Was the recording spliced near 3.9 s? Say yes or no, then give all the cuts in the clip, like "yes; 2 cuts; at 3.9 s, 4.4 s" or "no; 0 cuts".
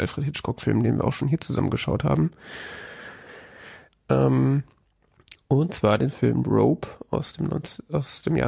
yes; 1 cut; at 3.9 s